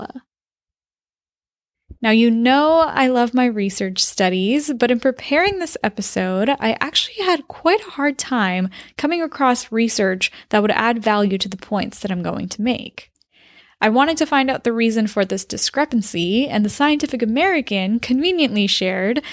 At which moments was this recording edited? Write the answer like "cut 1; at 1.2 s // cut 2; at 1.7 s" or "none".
cut 1; at 2.0 s